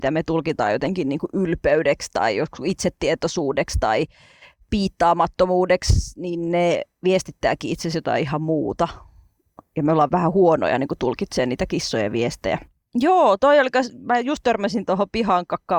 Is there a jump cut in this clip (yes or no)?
yes